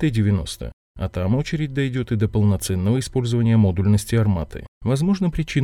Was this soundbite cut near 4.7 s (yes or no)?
yes